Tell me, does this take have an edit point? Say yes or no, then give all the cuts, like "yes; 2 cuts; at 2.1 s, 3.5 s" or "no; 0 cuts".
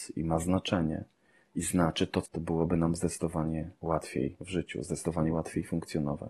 yes; 1 cut; at 2.2 s